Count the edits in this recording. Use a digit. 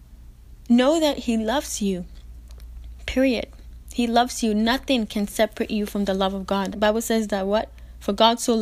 1